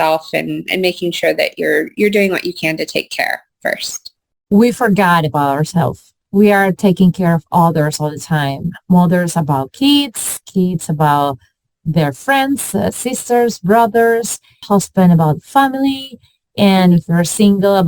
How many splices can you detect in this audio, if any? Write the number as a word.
zero